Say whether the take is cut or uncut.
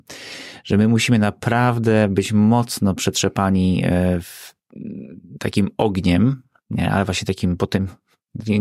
uncut